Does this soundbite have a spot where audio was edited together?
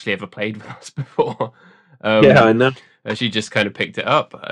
no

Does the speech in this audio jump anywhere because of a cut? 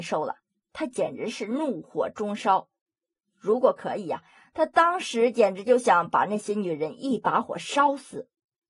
no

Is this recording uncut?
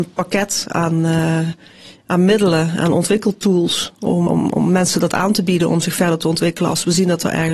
no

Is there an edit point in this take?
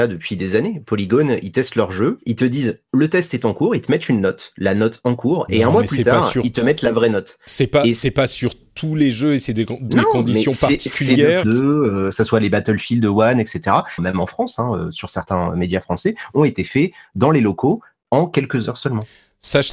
yes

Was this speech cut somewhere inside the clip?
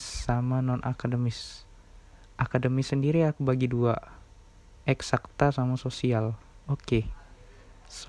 yes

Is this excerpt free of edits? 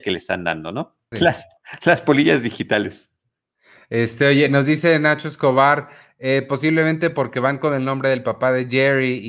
no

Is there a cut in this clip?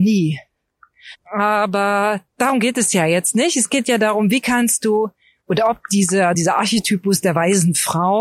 no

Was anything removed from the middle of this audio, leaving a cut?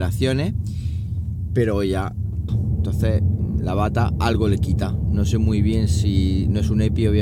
yes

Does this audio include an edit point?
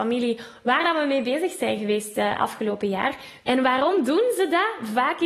yes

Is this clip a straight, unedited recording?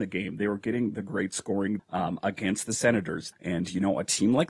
no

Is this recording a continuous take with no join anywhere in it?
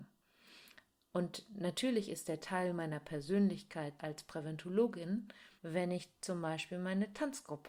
no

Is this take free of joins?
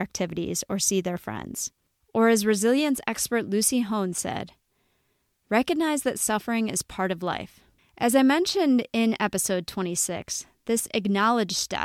no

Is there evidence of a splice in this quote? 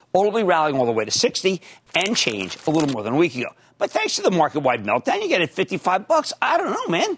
no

